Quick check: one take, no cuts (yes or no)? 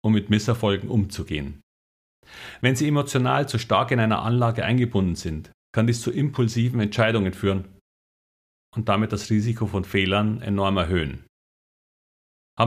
yes